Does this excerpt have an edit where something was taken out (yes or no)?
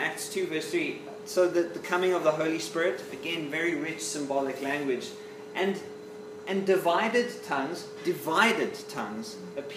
no